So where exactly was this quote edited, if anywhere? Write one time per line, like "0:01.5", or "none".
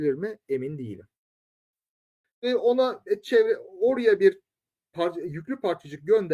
0:02.2